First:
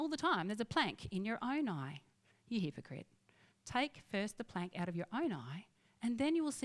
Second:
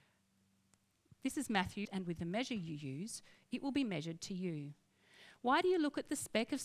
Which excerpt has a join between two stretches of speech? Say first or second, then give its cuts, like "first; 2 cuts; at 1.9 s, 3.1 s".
second; 1 cut; at 1.8 s